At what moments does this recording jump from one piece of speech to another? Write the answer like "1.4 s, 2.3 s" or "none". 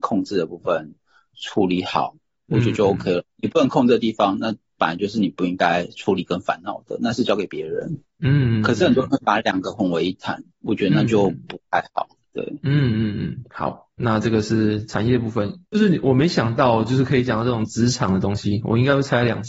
none